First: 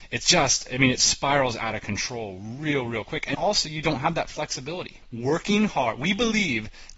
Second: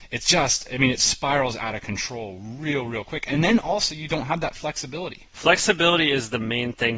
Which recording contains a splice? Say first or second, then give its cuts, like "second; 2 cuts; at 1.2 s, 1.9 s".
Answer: first; 2 cuts; at 3.3 s, 5.0 s